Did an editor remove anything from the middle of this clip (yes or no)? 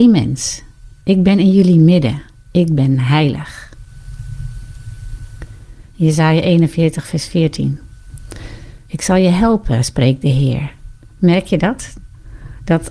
yes